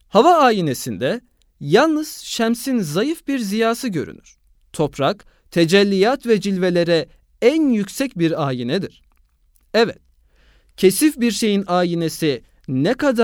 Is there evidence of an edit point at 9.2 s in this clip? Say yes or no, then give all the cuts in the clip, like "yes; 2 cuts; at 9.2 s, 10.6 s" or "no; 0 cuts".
no; 1 cut; at 4.6 s